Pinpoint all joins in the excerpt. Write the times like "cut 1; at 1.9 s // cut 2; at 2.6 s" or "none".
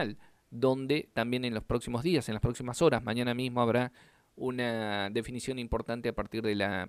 cut 1; at 1.1 s